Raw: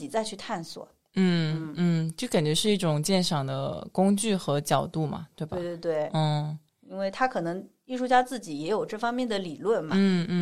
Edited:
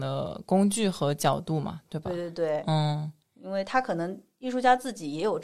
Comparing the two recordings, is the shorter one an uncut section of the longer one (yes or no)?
yes